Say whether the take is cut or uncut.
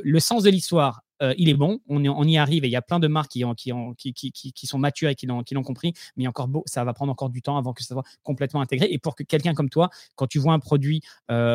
uncut